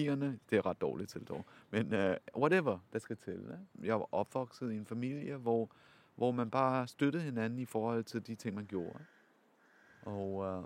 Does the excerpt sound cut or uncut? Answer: uncut